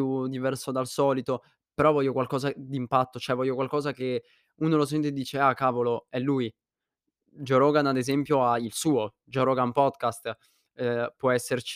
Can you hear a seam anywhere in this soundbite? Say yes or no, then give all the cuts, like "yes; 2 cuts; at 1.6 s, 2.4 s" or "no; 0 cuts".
no; 0 cuts